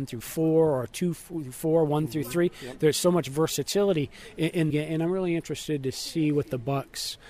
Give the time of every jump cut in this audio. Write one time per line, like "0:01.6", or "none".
0:04.7